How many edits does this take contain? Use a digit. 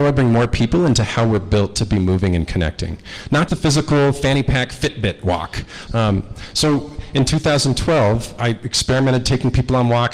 2